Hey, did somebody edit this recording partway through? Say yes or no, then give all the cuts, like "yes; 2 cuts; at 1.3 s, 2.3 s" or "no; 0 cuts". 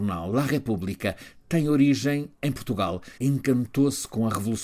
yes; 1 cut; at 3.2 s